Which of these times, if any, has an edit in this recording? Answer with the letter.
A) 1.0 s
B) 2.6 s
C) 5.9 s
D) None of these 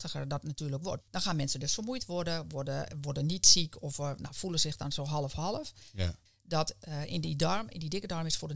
A